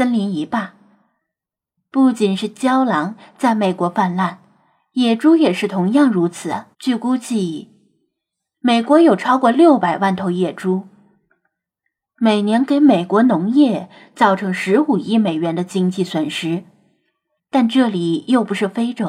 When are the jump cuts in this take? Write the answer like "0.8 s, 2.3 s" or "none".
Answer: 6.7 s, 17.4 s